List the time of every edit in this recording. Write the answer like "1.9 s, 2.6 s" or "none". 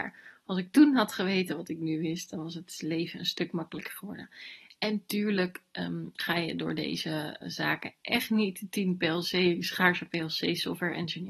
7.4 s

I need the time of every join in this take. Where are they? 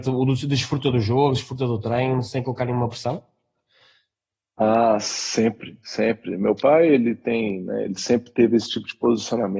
none

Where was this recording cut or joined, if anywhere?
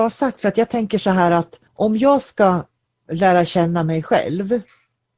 1.7 s

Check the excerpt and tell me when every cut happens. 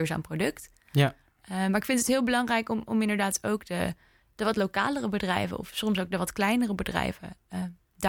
none

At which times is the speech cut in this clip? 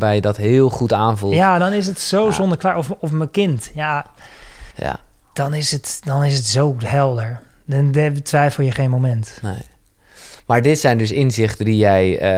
4.7 s

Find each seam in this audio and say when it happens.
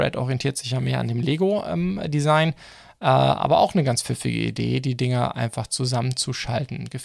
none

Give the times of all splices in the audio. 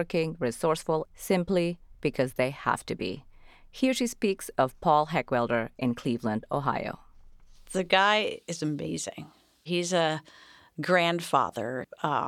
1.1 s

